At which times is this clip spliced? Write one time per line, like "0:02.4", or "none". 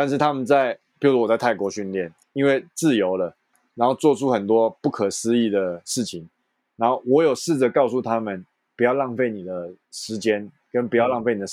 0:02.2